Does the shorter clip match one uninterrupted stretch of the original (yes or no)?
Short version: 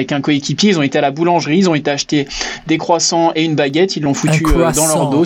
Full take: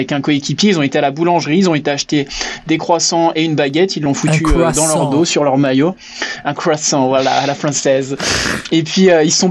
yes